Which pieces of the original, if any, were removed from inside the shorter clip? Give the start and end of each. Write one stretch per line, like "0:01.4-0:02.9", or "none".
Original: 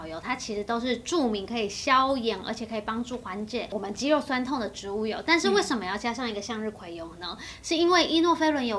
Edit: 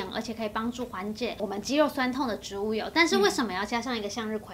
none

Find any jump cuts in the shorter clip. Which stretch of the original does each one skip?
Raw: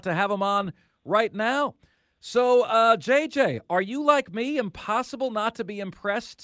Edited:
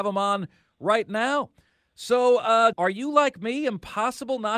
0:03.0-0:03.6

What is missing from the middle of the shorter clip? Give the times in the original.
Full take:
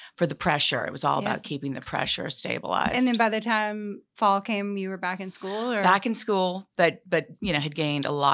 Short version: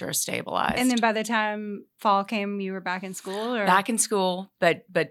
none

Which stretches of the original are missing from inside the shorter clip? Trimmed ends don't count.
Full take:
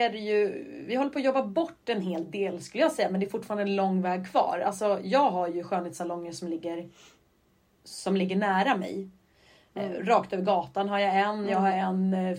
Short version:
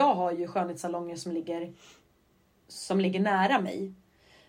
none

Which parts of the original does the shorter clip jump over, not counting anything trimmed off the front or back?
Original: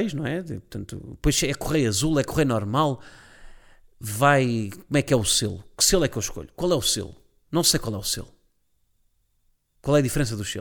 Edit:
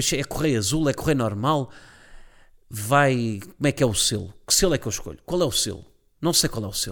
none

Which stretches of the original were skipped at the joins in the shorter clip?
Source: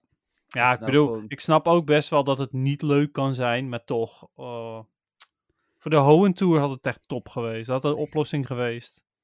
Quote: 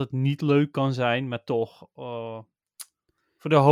none

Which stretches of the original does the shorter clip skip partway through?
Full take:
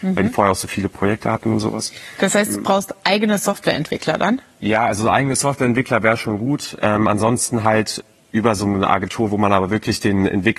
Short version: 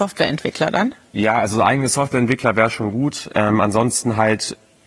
none

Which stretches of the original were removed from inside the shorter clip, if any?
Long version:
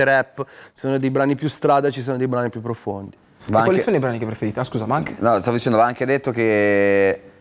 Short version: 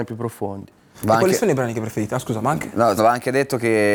0:05.4-0:05.7

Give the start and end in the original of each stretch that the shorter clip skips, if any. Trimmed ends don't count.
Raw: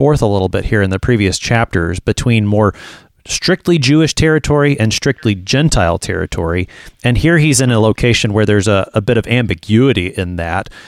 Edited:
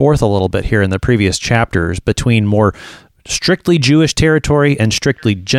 none

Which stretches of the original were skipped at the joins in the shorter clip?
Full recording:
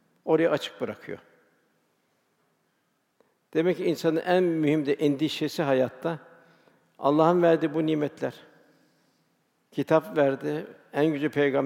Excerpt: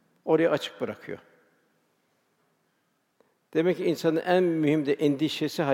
none

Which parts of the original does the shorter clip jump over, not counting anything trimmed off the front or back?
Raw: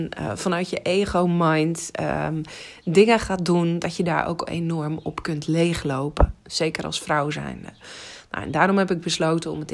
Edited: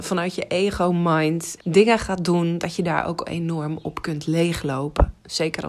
0:01.9-0:02.8

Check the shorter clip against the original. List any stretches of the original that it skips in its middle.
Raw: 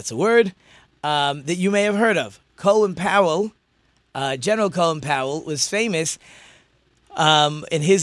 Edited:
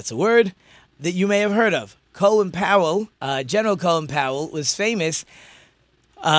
0:01.0-0:01.4
0:03.6-0:04.1

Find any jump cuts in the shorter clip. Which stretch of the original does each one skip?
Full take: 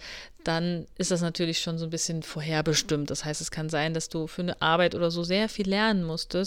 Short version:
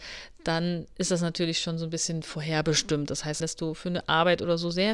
0:03.4-0:03.9

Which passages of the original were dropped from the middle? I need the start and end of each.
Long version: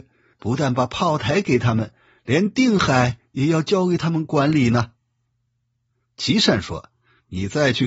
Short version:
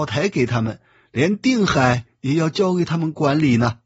none

